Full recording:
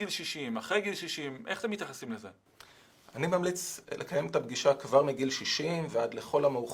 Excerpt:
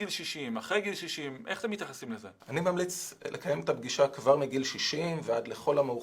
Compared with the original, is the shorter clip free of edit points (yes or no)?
no